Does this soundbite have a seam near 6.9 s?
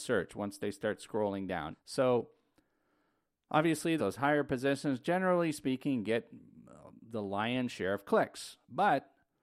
no; 2 cuts; at 1.7 s, 4.0 s

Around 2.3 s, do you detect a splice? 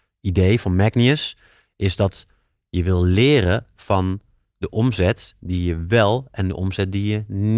no; 0 cuts

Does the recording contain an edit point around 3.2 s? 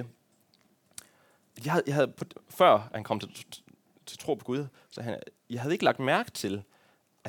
no; 0 cuts

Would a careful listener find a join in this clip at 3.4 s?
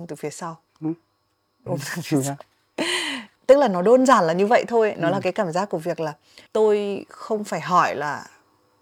no; 2 cuts; at 1.7 s, 6.5 s

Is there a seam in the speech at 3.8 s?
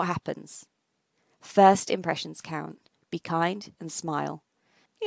yes; 1 cut; at 3.8 s

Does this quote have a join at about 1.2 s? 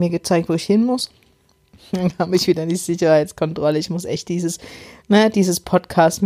no; 0 cuts

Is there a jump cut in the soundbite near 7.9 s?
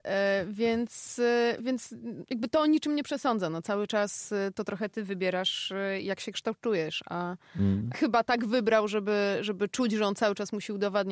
yes; 2 cuts; at 1.6 s, 7.9 s

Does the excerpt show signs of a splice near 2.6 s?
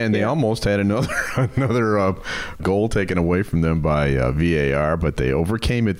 yes; 1 cut; at 2.6 s

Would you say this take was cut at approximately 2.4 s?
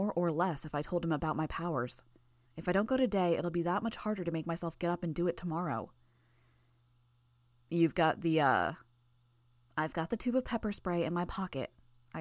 yes; 1 cut; at 2.4 s

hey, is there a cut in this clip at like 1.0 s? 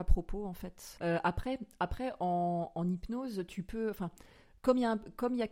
yes; 1 cut; at 1.0 s

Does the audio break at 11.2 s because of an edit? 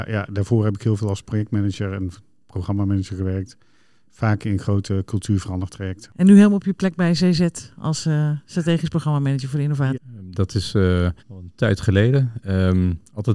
yes; 2 cuts; at 9.9 s, 11.2 s

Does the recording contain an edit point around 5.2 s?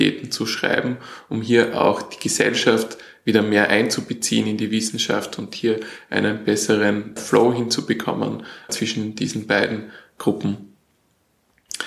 no; 2 cuts; at 7.2 s, 8.7 s

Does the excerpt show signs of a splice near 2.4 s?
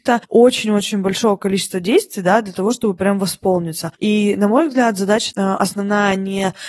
no; 2 cuts; at 3.9 s, 5.3 s

